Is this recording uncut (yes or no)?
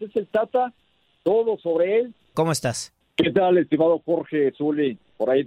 no